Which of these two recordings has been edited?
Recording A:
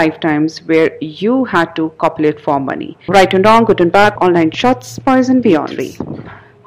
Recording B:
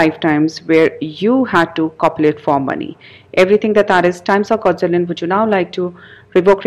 A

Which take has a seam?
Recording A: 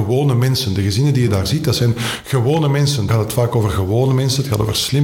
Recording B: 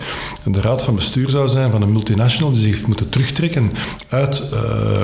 A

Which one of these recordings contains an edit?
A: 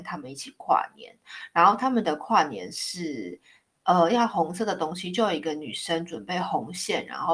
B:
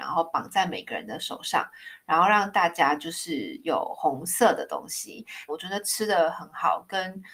B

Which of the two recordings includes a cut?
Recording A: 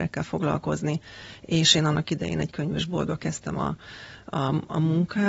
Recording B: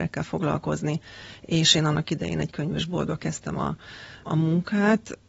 B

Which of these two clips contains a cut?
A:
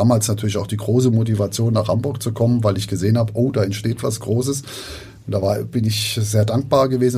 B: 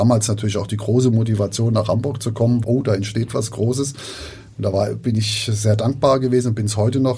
B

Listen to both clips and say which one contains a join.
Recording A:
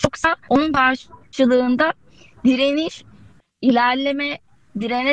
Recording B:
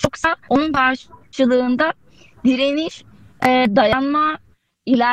A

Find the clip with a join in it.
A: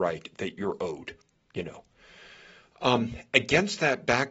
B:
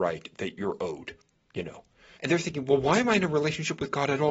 B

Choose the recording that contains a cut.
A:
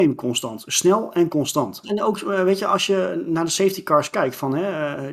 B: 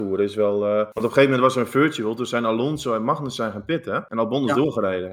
A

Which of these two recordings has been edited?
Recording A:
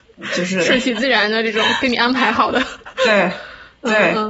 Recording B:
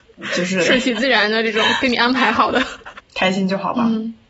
B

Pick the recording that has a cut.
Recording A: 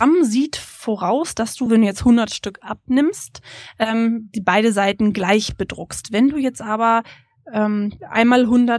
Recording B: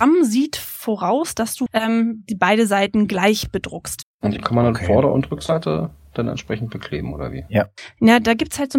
B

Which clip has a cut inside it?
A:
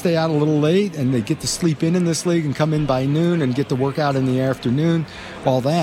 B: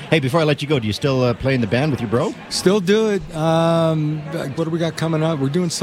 B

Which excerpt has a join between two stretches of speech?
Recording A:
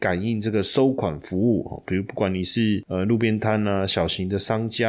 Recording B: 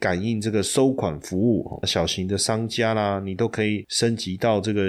B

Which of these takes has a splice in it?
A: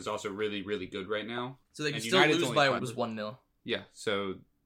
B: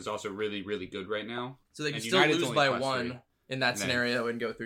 A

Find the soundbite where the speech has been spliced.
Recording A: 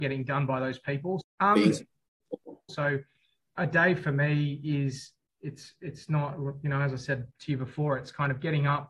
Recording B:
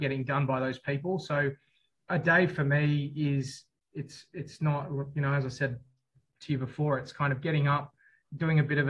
A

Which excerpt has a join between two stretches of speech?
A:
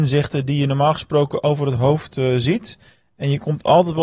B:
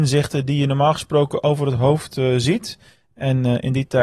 B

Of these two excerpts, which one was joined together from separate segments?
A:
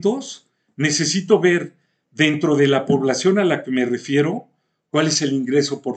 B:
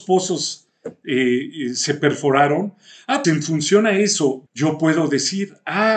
B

